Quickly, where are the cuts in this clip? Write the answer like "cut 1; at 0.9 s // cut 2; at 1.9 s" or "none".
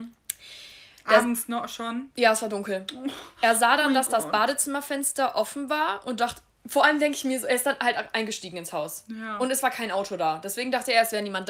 none